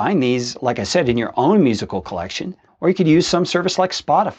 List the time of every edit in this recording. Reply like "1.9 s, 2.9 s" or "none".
2.7 s